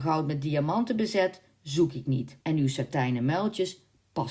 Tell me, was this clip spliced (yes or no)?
yes